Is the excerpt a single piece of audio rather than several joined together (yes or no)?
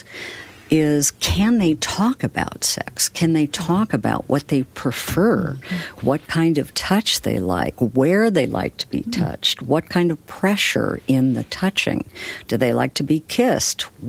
no